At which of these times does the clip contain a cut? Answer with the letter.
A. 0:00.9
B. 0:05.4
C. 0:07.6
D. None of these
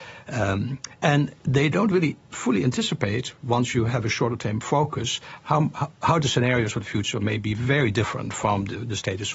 B